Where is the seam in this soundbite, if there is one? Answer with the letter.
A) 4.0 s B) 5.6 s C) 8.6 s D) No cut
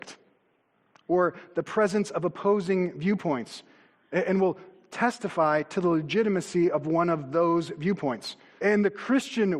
C